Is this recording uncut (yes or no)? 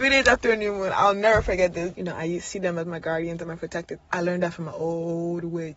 no